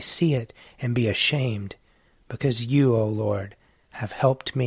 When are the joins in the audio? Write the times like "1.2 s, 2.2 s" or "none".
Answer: none